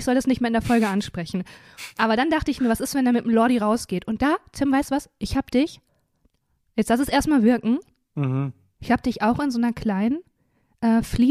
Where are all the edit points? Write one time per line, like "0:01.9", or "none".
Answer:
none